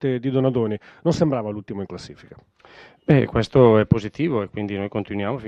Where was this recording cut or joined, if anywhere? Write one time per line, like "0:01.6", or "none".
none